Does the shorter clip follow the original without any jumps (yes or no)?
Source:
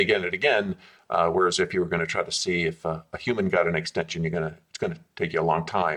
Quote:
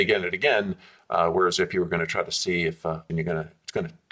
no